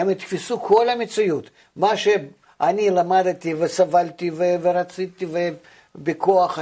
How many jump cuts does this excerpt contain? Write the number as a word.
zero